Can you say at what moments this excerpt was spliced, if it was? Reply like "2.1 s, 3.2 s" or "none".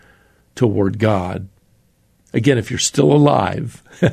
2.3 s